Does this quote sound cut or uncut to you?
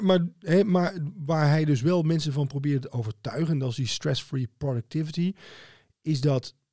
uncut